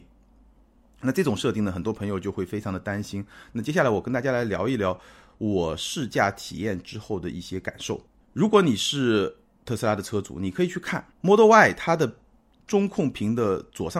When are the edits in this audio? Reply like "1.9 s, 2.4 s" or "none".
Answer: 8.2 s, 11.1 s